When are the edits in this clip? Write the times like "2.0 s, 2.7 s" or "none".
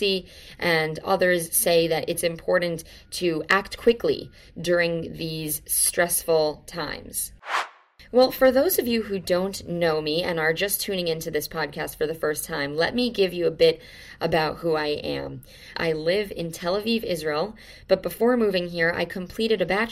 15.7 s